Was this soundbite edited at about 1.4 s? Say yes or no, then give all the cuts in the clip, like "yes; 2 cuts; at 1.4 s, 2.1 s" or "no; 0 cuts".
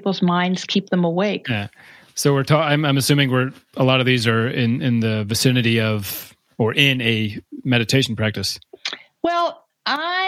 yes; 1 cut; at 1.4 s